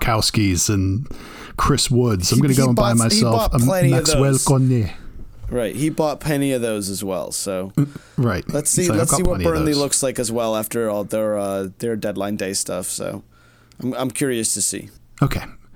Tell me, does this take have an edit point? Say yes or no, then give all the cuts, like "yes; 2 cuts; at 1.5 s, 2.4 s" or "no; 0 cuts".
no; 0 cuts